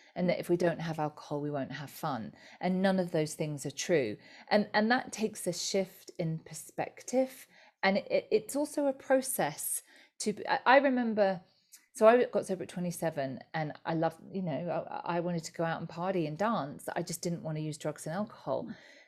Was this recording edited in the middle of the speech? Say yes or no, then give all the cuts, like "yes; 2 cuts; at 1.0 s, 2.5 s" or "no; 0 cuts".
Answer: no; 0 cuts